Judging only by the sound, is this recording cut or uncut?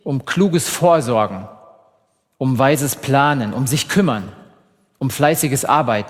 uncut